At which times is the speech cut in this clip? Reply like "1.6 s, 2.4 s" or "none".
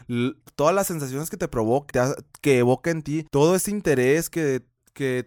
1.9 s